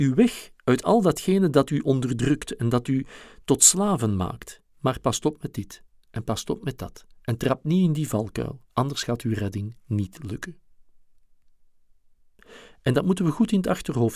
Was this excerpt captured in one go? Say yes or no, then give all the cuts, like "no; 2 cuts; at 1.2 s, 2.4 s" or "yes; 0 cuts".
no; 2 cuts; at 4.7 s, 8.7 s